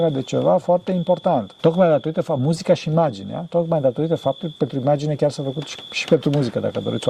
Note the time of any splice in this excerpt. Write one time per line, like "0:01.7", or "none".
0:01.6